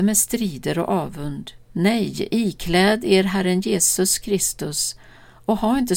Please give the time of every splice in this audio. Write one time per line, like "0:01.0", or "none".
0:01.6